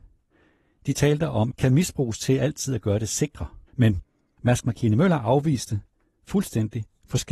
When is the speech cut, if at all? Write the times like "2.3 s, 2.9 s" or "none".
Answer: 1.5 s, 3.7 s